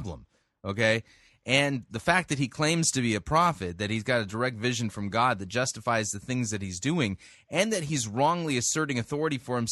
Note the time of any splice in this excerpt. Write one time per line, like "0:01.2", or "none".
none